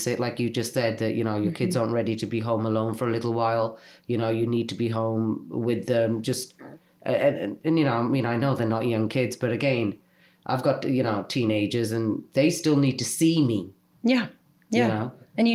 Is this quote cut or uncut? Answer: uncut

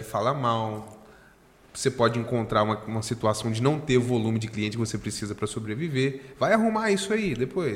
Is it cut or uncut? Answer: uncut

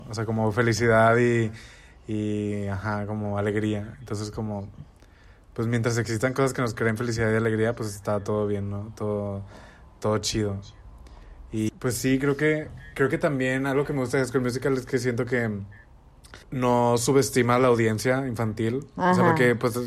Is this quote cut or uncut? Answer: cut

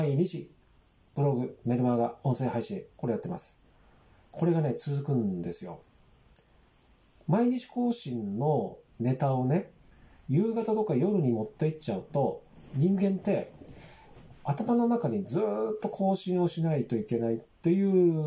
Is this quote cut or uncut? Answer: uncut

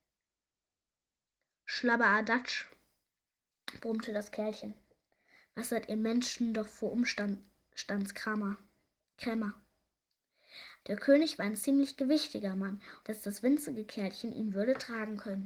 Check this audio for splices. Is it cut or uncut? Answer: cut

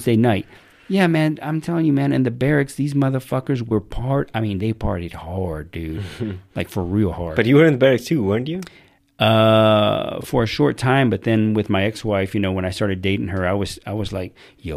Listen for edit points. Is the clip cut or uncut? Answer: uncut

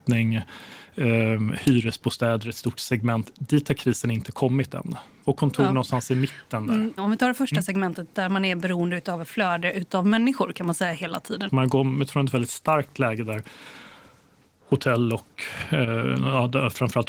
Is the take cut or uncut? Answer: cut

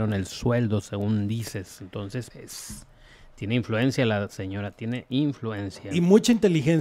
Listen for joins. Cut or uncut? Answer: cut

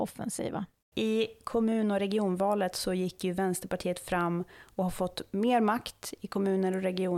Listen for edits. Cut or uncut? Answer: cut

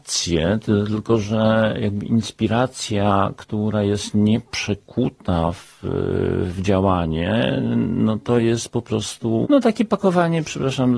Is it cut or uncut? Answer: cut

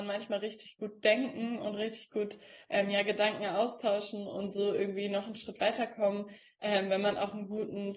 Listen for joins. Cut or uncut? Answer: uncut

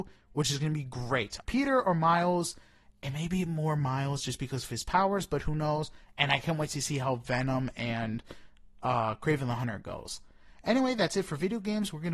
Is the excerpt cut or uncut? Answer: cut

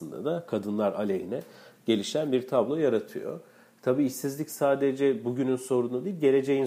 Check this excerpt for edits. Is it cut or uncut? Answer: uncut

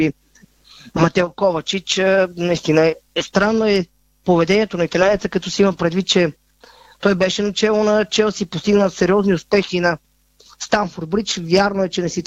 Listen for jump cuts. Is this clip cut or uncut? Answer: uncut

